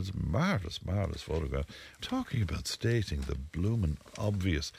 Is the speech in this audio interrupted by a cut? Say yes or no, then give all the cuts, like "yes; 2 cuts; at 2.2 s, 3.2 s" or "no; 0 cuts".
yes; 1 cut; at 2.0 s